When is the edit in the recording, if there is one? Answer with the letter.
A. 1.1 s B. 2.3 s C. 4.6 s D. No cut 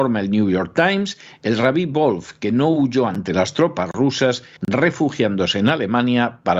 C